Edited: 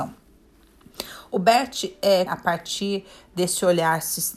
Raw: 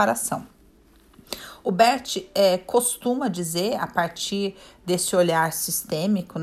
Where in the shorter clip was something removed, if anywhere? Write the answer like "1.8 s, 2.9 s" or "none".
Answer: 2.3 s